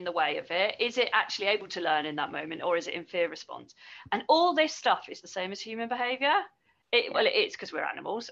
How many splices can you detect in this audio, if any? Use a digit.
1